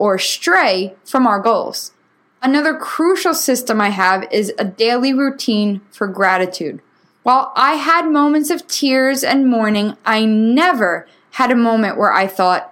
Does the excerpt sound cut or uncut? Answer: uncut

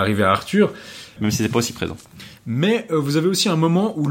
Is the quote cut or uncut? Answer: cut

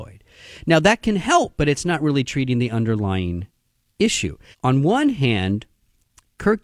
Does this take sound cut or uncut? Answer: cut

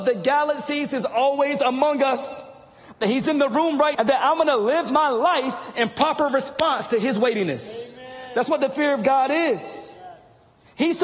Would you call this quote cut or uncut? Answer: cut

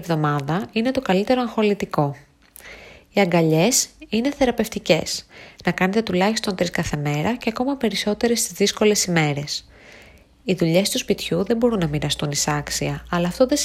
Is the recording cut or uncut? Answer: uncut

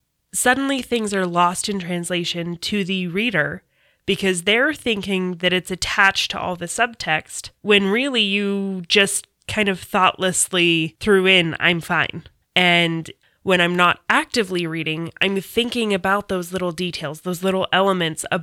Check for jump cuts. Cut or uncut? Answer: cut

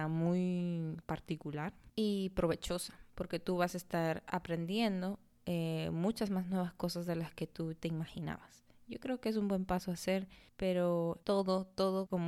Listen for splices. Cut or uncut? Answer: uncut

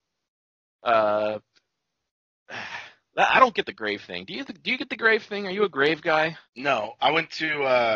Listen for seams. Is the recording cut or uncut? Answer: cut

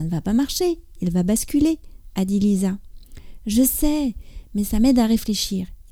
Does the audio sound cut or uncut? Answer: uncut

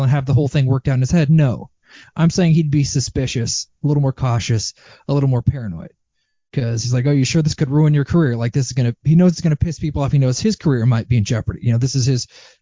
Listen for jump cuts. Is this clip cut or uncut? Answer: uncut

